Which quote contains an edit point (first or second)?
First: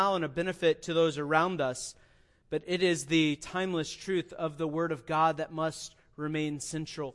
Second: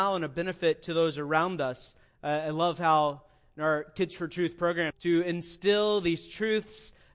second